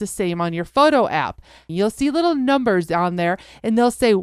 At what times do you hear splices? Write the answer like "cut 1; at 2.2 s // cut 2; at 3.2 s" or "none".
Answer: cut 1; at 1.7 s